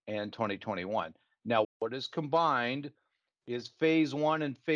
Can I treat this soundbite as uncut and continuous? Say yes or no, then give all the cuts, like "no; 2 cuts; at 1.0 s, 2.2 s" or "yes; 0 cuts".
no; 1 cut; at 1.6 s